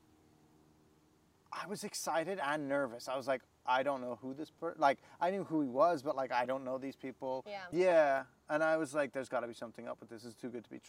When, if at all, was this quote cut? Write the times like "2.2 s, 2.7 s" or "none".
7.7 s